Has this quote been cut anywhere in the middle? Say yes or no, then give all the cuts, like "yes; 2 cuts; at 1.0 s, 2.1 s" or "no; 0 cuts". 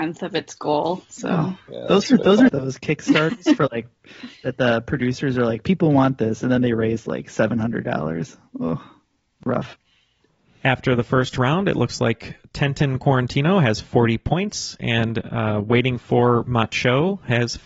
yes; 1 cut; at 2.5 s